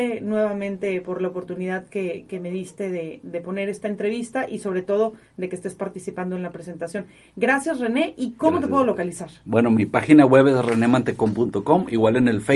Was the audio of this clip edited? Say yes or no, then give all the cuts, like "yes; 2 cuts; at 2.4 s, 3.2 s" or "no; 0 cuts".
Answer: no; 0 cuts